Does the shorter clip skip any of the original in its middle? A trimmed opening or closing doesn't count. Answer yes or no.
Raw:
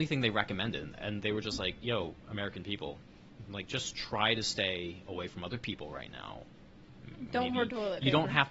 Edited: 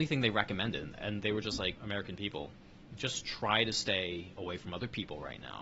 yes